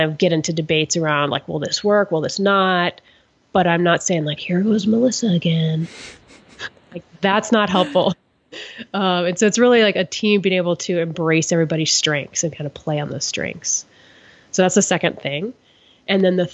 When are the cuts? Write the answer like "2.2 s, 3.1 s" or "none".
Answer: 4.4 s